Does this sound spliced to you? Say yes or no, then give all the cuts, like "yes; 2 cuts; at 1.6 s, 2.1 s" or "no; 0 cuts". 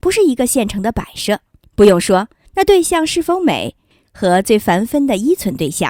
yes; 2 cuts; at 1.6 s, 4.0 s